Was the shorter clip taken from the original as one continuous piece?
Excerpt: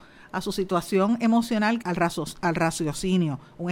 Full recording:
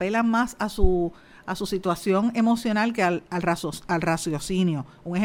no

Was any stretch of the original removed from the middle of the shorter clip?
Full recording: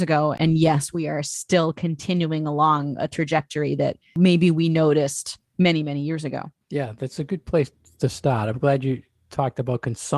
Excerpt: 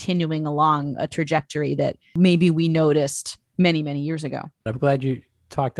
yes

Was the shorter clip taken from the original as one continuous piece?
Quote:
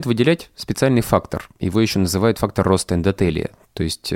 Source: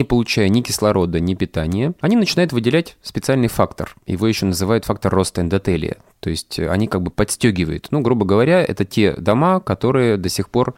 yes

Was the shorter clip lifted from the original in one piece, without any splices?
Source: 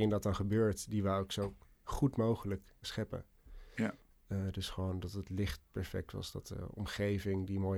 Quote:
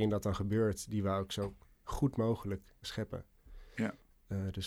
yes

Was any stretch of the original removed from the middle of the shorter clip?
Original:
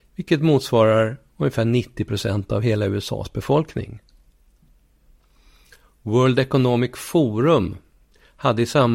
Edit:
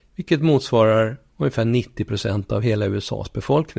no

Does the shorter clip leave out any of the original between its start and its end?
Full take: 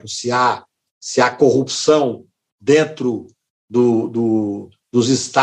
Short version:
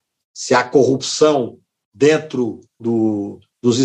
yes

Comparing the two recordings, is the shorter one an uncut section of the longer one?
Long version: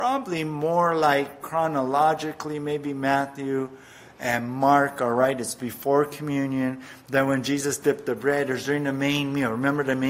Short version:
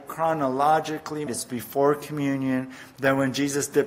no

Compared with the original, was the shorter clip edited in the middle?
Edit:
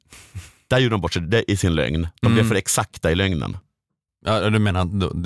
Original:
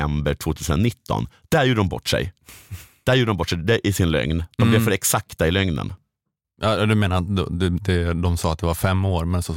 no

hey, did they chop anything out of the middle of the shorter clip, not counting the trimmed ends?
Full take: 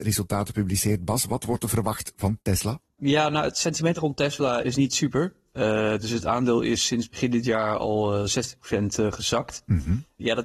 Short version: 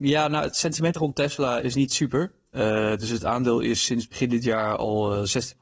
no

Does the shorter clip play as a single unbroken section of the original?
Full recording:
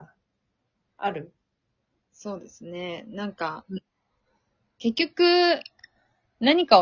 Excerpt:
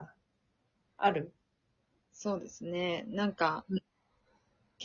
yes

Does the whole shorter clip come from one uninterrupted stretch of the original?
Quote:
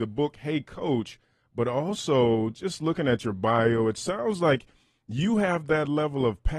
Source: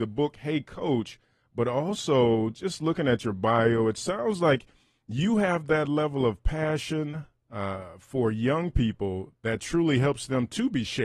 yes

